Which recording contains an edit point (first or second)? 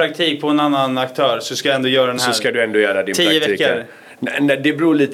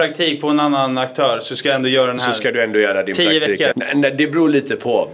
second